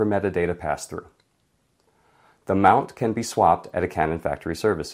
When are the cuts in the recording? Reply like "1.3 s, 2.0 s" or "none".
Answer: none

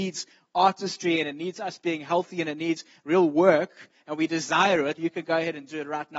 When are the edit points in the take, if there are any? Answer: 5.0 s

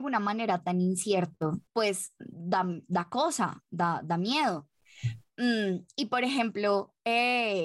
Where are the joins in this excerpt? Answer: 1.7 s

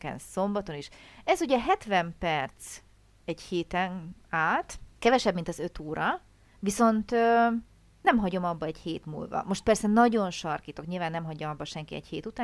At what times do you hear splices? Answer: 5.0 s

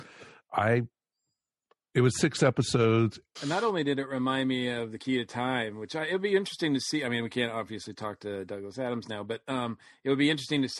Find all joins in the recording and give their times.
3.4 s

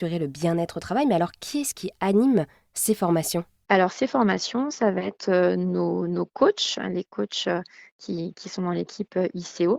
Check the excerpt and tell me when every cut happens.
none

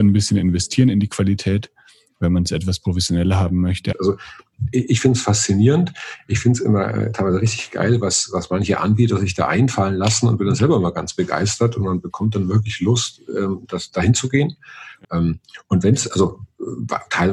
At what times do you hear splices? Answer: 3.9 s, 15.0 s

